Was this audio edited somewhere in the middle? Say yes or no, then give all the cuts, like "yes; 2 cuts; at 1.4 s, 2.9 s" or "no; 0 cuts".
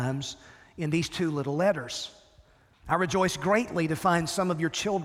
yes; 1 cut; at 2.7 s